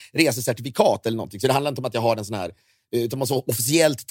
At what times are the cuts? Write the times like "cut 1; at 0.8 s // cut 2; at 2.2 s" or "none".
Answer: none